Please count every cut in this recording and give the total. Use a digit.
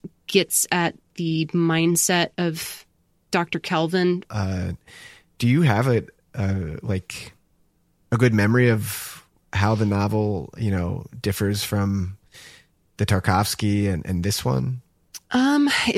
1